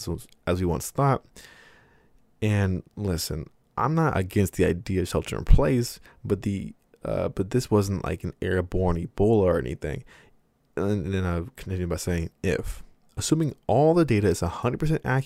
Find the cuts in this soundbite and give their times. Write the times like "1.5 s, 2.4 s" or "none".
12.4 s